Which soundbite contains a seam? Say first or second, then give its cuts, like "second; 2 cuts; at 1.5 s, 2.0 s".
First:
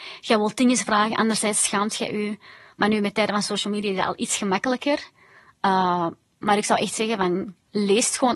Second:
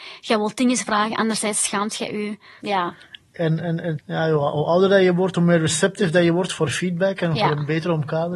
second; 2 cuts; at 2.6 s, 4.0 s